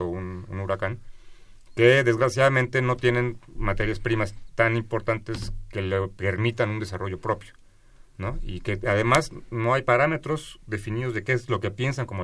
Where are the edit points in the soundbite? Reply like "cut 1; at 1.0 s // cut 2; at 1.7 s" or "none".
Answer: none